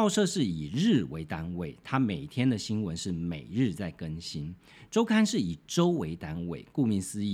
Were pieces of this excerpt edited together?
no; 0 cuts

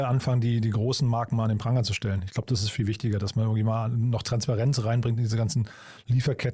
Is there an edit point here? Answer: no; 0 cuts

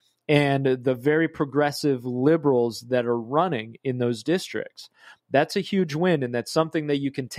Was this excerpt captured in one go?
yes; 0 cuts

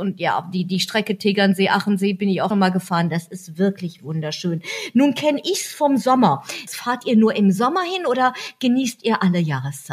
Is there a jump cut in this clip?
yes; 3 cuts; at 2.5 s, 4.0 s, 6.7 s

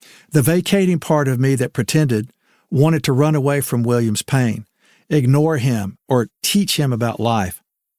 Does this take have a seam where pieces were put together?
no; 0 cuts

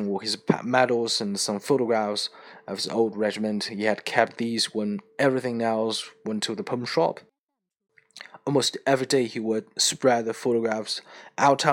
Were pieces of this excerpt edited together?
no; 0 cuts

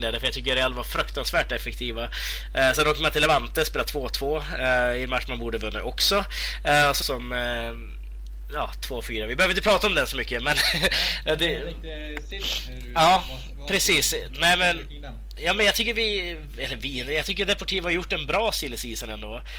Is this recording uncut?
no; 1 cut; at 7.0 s

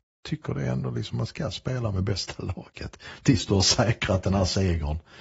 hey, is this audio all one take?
yes; 0 cuts

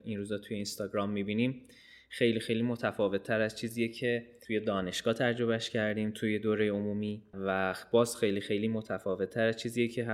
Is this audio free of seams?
yes; 0 cuts

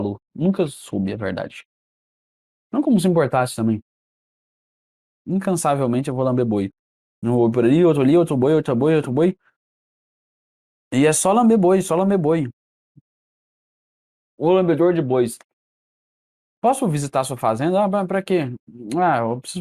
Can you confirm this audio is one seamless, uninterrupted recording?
no; 1 cut; at 5.1 s

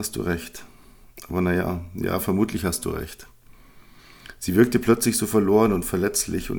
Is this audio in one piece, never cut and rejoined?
yes; 0 cuts

